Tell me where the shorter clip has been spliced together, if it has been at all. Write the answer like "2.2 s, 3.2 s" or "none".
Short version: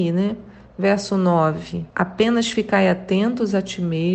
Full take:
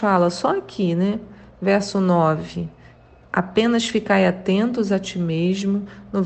1.9 s